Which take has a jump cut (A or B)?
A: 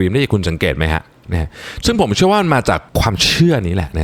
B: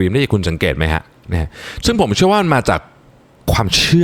A